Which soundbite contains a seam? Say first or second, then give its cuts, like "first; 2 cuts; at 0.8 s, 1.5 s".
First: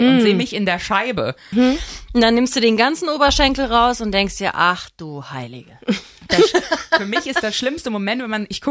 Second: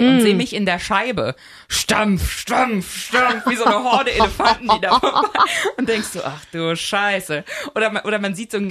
first; 1 cut; at 1.5 s